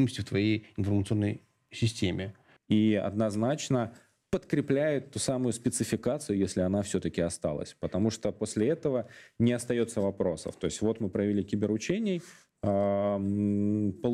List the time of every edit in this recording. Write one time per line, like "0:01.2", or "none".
0:02.6